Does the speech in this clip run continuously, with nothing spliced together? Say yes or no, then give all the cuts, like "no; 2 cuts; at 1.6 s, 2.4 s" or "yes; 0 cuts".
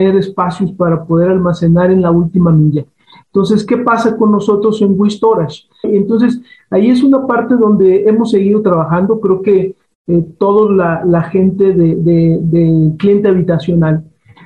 no; 2 cuts; at 5.8 s, 12.0 s